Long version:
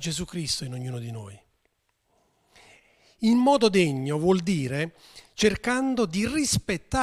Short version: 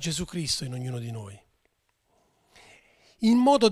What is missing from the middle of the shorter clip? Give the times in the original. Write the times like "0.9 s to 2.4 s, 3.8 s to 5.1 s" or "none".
none